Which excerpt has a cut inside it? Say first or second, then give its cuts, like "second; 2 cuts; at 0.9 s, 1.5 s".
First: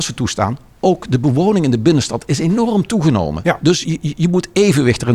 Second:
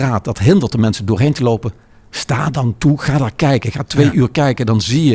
first; 1 cut; at 3.8 s